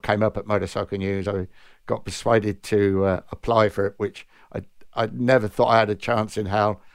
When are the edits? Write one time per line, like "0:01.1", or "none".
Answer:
none